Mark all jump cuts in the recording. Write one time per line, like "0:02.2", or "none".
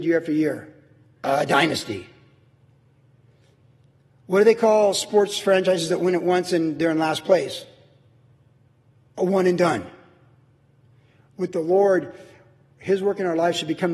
none